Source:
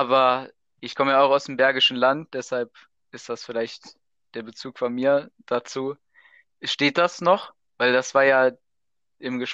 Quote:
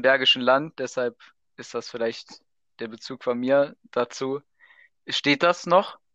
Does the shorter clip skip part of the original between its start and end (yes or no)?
no